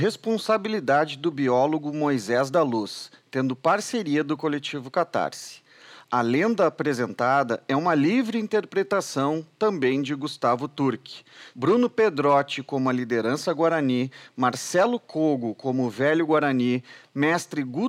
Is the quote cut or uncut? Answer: cut